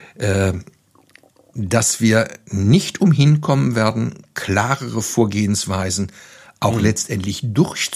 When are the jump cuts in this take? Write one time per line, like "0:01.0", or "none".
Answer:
none